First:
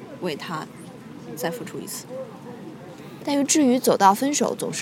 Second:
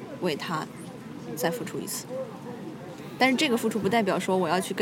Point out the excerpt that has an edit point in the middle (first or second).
first